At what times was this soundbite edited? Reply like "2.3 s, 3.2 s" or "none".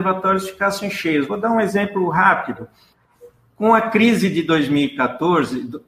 none